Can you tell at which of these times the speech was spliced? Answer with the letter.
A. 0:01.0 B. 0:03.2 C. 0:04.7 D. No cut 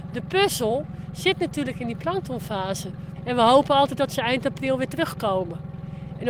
B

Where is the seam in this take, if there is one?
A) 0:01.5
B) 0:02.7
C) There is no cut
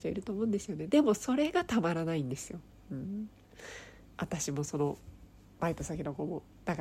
C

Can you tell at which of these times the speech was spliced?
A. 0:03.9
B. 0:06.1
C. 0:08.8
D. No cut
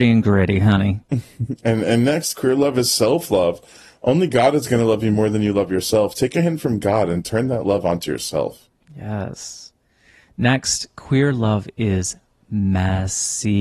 D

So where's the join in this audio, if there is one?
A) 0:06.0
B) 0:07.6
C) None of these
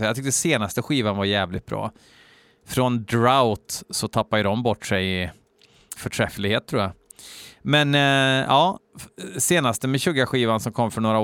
A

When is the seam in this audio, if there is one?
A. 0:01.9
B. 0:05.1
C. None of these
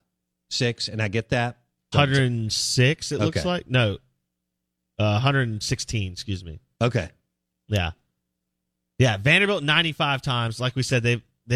A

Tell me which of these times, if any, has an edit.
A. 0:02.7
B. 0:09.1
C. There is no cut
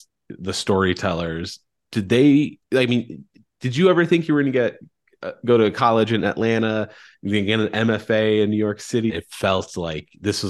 B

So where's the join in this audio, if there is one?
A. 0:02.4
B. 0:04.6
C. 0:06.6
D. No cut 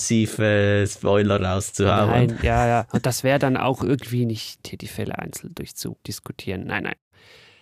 B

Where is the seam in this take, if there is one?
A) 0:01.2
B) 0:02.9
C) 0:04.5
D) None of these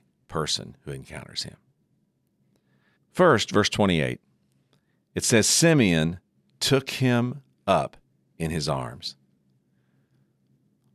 B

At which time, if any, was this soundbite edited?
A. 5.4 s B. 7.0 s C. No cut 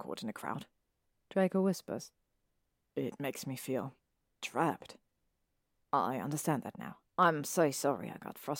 B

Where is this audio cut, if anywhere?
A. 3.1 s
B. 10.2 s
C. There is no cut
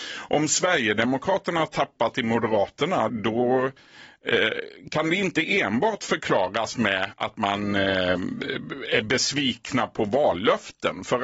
A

